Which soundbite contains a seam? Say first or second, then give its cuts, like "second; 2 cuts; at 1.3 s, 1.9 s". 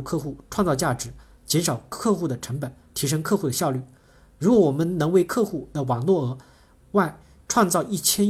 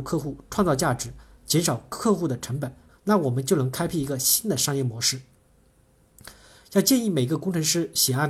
second; 1 cut; at 2.9 s